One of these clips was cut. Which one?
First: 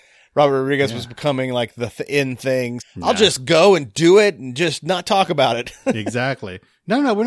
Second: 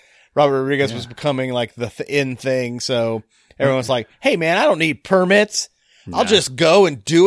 first; 1 cut; at 2.8 s

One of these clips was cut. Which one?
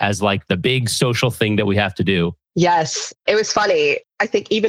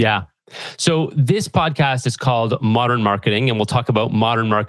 first; 1 cut; at 2.4 s

